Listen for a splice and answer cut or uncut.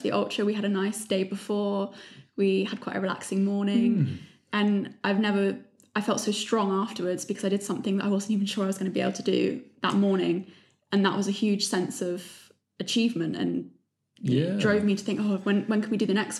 uncut